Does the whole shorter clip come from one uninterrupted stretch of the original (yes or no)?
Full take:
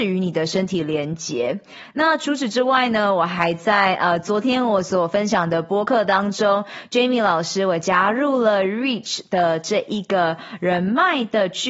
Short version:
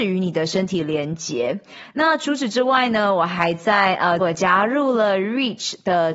no